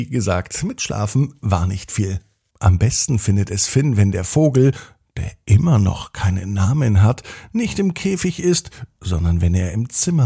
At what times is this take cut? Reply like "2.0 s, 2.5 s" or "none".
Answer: 2.5 s